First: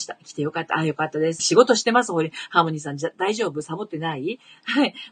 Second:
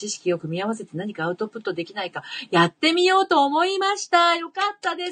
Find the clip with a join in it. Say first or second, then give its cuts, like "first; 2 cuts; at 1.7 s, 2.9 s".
first; 1 cut; at 1.4 s